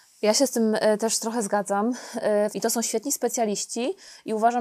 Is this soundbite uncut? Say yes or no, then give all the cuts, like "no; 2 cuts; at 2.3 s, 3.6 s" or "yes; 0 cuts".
no; 1 cut; at 2.5 s